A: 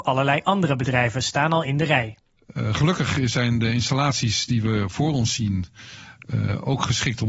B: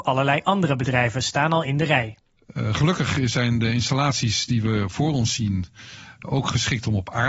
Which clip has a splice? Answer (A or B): B